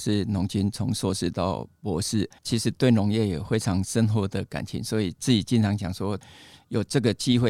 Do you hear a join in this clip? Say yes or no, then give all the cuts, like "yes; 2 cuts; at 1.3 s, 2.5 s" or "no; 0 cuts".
yes; 1 cut; at 2.4 s